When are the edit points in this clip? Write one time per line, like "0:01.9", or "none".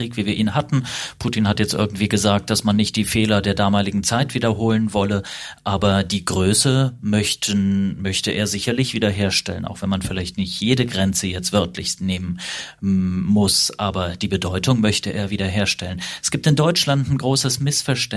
none